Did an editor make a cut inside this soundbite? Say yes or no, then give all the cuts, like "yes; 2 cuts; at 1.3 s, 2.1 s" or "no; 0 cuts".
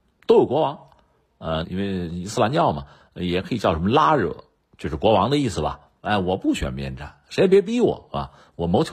yes; 2 cuts; at 1.6 s, 6.0 s